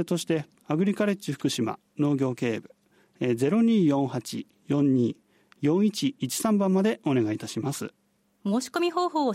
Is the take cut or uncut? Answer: uncut